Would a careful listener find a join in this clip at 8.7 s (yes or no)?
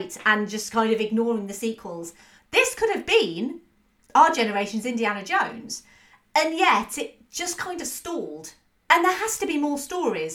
no